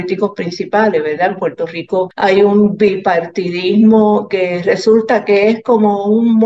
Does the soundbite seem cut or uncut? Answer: uncut